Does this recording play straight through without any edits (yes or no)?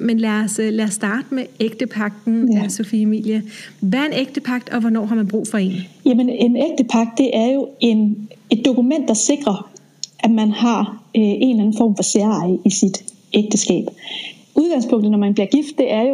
yes